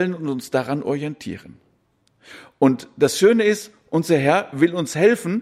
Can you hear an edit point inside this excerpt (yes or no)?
no